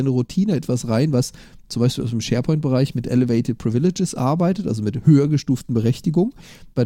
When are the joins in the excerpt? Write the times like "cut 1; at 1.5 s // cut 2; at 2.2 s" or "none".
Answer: none